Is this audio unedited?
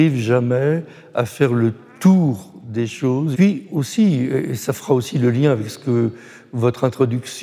no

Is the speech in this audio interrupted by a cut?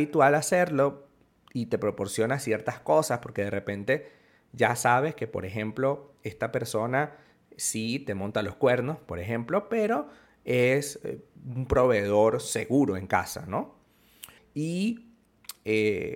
yes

